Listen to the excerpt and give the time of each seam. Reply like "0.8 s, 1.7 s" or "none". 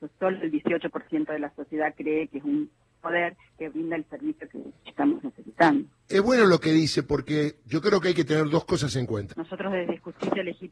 9.3 s